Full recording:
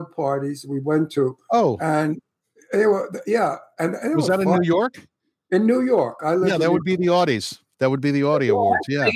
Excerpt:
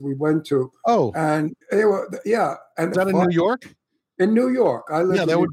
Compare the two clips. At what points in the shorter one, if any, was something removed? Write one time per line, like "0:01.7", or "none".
0:01.6
0:02.9